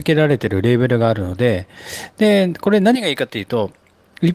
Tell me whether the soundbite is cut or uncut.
uncut